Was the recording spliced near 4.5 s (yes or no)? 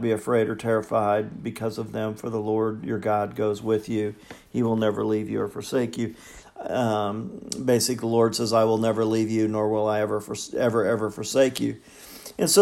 no